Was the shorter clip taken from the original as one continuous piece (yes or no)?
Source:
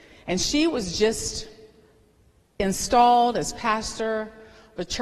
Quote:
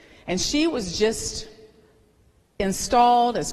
yes